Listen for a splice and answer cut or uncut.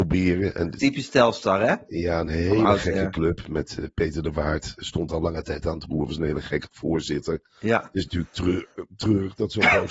uncut